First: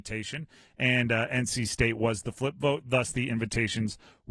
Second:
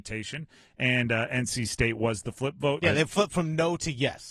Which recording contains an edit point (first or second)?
second